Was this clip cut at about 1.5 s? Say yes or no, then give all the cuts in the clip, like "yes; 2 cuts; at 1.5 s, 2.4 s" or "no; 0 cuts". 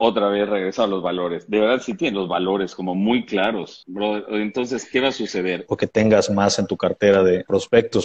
no; 1 cut; at 5.7 s